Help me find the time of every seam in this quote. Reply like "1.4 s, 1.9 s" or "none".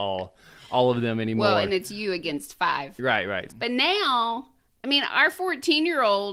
3.5 s